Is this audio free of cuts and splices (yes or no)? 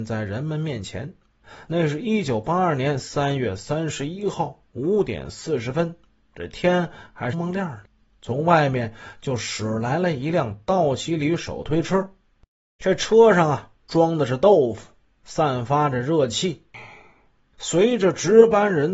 no